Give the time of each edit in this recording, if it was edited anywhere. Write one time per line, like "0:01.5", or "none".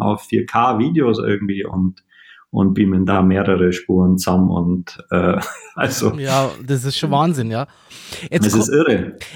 none